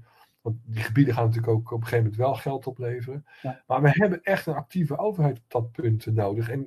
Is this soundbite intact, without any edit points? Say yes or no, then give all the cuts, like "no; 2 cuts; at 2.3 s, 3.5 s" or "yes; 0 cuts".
yes; 0 cuts